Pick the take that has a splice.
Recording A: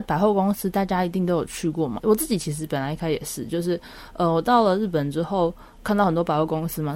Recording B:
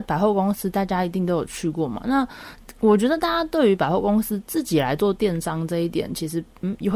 A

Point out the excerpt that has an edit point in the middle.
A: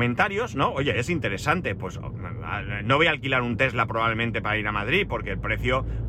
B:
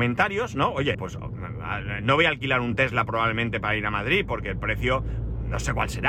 B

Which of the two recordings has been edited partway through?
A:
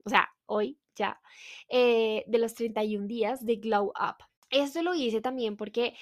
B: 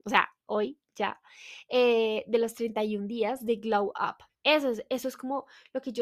B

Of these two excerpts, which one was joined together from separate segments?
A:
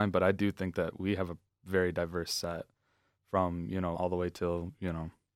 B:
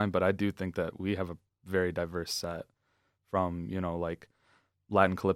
A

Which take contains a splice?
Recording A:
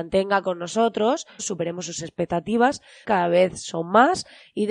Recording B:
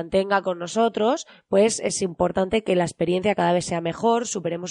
A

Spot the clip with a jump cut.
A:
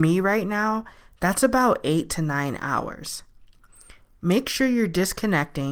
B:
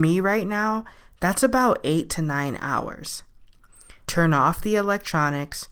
B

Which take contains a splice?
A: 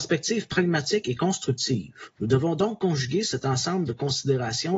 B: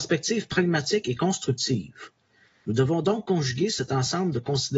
A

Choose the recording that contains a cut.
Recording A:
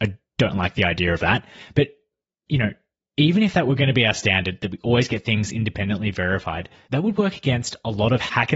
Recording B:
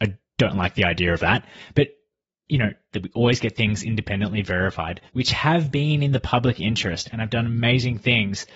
B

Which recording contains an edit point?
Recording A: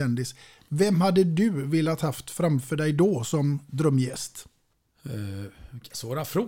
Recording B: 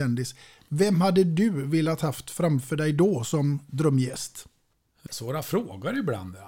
B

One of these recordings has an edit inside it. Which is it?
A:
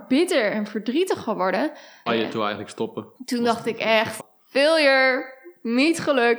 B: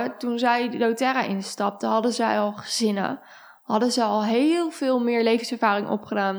A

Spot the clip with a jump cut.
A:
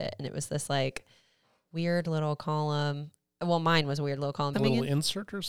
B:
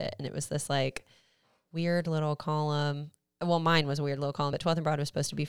A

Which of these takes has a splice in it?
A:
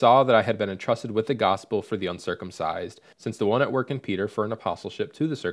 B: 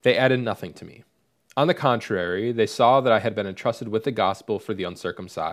A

